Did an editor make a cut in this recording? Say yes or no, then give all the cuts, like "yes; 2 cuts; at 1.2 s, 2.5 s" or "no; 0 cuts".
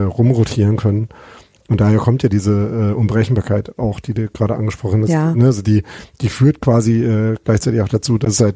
no; 0 cuts